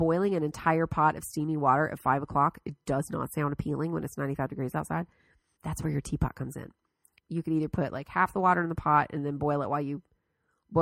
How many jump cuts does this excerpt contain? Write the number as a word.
two